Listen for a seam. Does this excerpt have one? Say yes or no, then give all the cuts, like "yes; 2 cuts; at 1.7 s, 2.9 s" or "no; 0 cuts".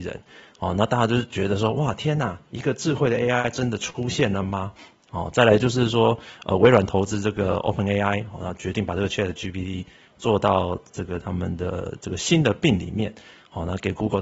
no; 0 cuts